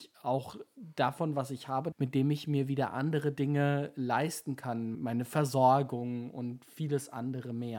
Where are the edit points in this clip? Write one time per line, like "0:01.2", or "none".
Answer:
0:01.9
0:04.9